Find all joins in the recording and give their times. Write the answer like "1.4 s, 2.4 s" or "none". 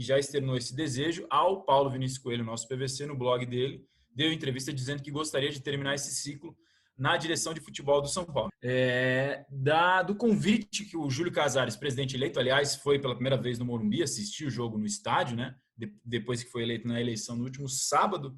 8.5 s